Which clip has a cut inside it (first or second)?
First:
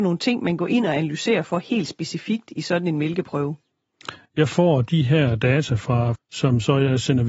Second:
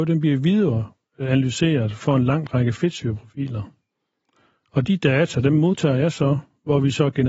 first